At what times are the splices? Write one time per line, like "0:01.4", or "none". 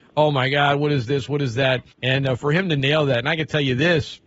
0:01.9